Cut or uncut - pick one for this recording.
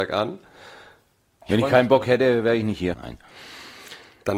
cut